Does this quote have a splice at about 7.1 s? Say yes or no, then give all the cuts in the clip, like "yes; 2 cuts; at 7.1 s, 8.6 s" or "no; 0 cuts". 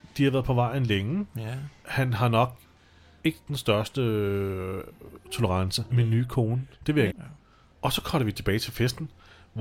yes; 2 cuts; at 5.9 s, 7.1 s